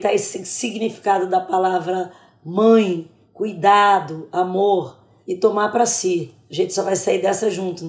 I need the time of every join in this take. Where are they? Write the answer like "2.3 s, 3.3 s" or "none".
none